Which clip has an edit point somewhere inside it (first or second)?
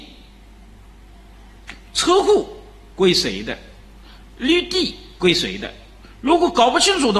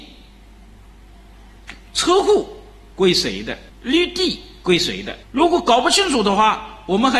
second